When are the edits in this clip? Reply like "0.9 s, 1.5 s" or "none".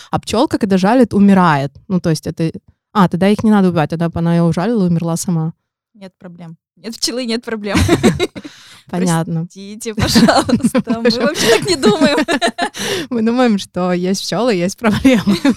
none